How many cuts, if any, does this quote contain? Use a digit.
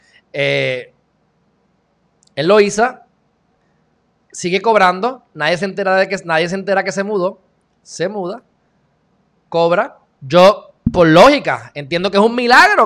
1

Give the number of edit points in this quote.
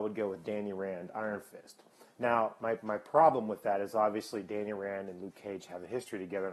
0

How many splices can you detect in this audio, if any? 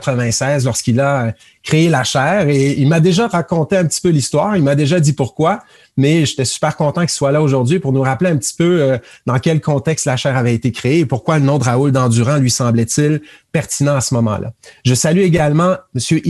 0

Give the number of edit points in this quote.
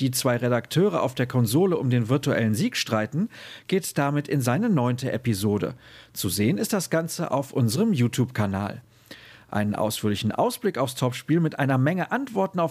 0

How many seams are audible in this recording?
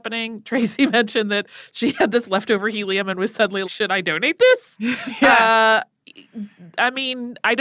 1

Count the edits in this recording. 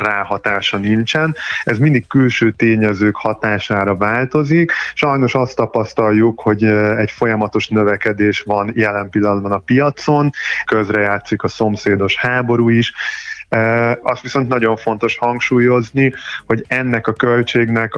2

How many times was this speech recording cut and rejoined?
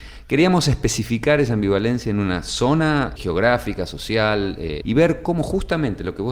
2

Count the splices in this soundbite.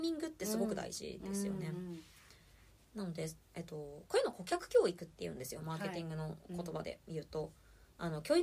0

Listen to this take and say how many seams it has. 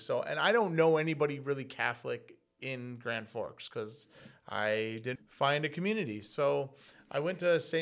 1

